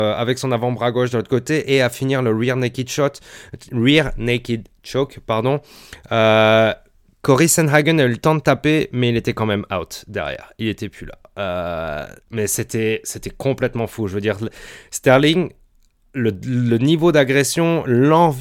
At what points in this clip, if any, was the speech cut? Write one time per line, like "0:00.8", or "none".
0:12.2